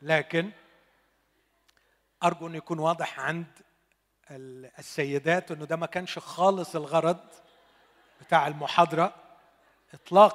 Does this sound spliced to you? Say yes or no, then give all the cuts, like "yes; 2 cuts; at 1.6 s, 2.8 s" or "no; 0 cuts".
no; 0 cuts